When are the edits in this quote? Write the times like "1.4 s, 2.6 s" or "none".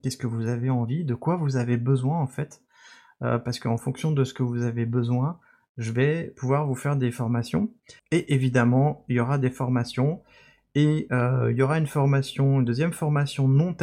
8.0 s